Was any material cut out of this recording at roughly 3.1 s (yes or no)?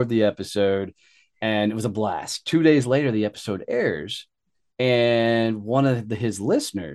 no